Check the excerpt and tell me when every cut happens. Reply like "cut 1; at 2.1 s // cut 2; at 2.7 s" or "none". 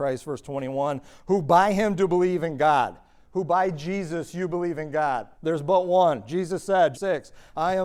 cut 1; at 5.3 s // cut 2; at 6.9 s